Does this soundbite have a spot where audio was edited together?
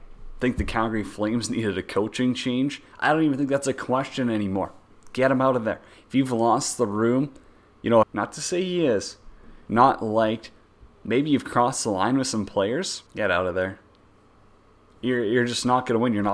yes; 3 cuts; at 8.0 s, 9.7 s, 13.1 s

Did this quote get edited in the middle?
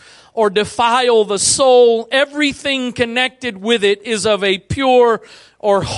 no; 0 cuts

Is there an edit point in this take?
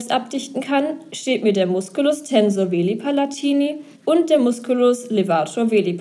yes; 1 cut; at 4.0 s

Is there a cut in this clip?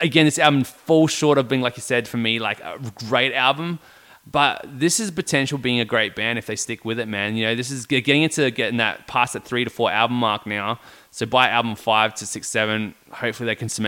no; 0 cuts

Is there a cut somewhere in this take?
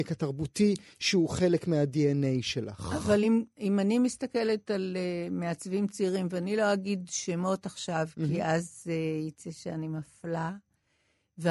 no; 0 cuts

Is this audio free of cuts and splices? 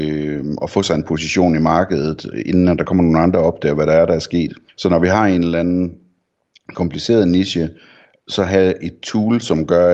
no; 1 cut; at 4.7 s

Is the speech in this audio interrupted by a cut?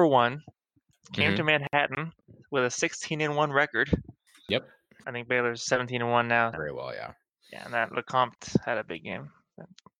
yes; 2 cuts; at 5.0 s, 6.5 s

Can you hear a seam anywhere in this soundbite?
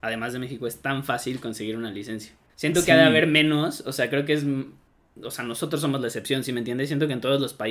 no; 0 cuts

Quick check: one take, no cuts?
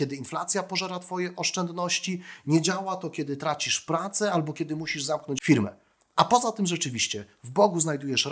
yes; 0 cuts

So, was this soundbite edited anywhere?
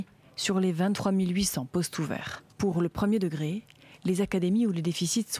yes; 1 cut; at 2.5 s

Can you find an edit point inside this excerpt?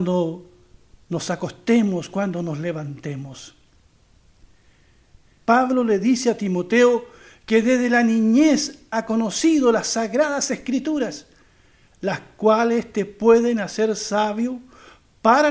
yes; 1 cut; at 5.4 s

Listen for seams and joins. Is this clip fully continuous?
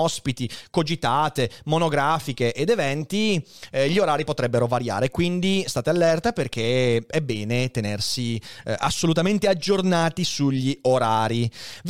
yes; 0 cuts

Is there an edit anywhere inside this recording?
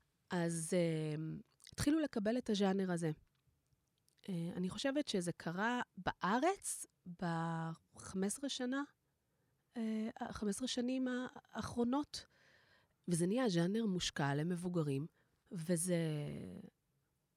no; 0 cuts

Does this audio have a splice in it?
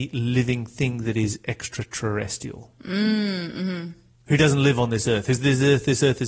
no; 0 cuts

